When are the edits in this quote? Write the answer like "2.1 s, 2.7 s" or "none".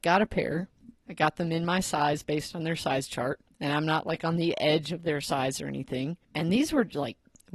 none